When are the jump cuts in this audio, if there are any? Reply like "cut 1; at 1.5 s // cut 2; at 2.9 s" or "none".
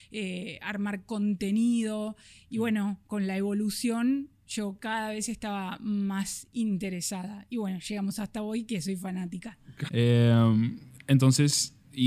cut 1; at 9.9 s